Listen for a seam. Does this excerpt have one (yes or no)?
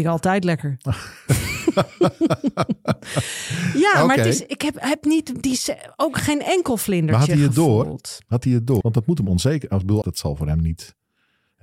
yes